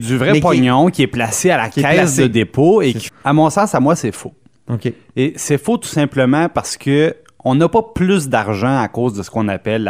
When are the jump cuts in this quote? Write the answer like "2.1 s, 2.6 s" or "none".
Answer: 3.1 s